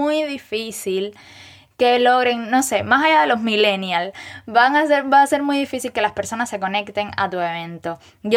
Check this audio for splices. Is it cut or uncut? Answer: uncut